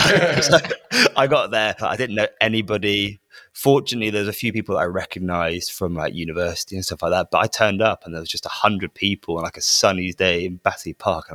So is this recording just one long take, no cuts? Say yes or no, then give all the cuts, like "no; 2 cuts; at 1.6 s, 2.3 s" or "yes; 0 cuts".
yes; 0 cuts